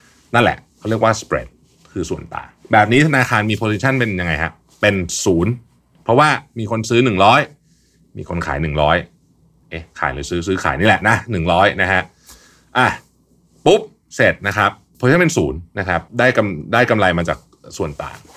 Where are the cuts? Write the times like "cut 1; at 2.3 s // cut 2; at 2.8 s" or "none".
cut 1; at 16.1 s

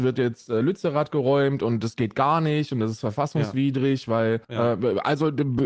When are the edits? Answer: cut 1; at 4.4 s

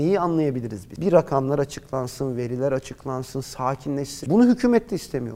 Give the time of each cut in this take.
cut 1; at 4.2 s

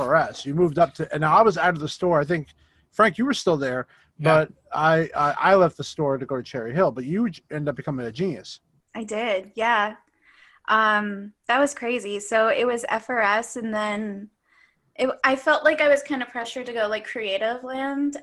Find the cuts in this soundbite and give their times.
none

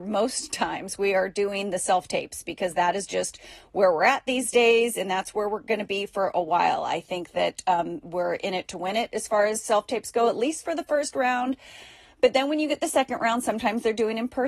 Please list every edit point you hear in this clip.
none

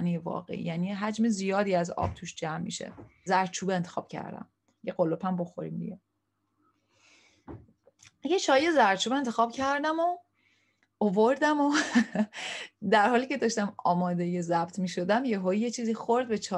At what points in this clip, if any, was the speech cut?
cut 1; at 3.3 s

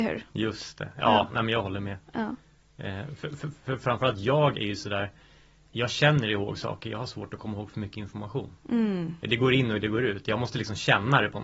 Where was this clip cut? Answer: cut 1; at 5.7 s

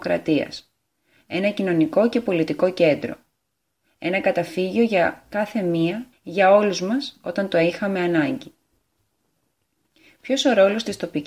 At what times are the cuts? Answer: cut 1; at 6.1 s

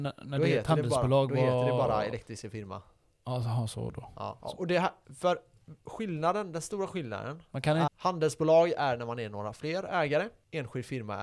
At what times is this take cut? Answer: cut 1; at 4.4 s // cut 2; at 7.9 s

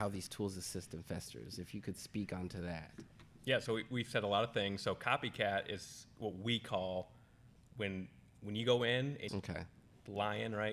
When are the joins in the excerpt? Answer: cut 1; at 9.3 s

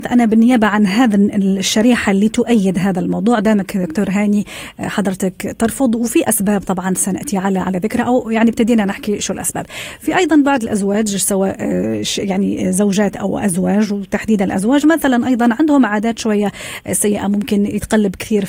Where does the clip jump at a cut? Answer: none

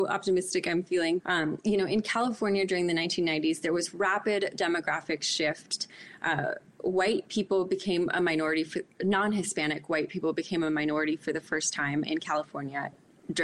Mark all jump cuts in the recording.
cut 1; at 1.2 s

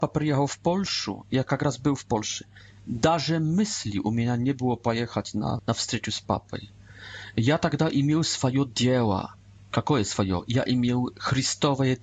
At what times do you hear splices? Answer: cut 1; at 5.6 s

